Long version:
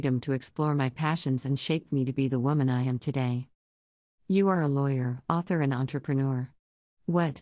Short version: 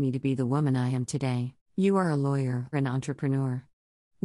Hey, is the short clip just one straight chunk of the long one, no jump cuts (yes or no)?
no